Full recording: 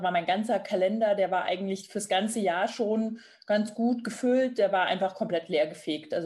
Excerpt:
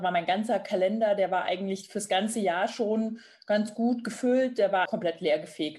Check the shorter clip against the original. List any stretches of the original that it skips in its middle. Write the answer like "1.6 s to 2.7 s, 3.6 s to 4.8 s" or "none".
4.9 s to 5.1 s